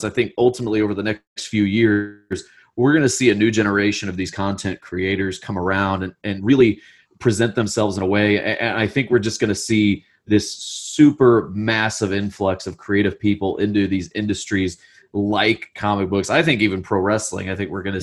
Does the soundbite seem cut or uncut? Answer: uncut